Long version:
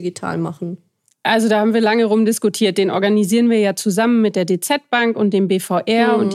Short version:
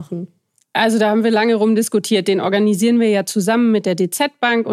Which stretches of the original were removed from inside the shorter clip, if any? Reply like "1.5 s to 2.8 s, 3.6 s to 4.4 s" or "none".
none